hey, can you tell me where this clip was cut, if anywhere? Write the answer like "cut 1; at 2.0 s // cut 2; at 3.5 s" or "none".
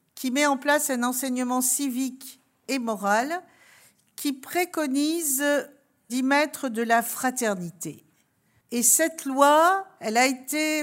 cut 1; at 8.6 s